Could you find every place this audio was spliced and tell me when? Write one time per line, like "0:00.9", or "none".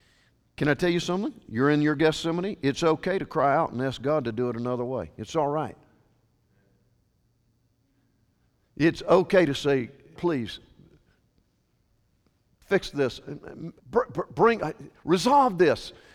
0:10.2
0:13.8